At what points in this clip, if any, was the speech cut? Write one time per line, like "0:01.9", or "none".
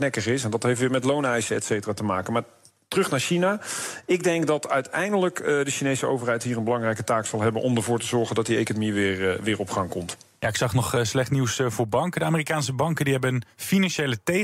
none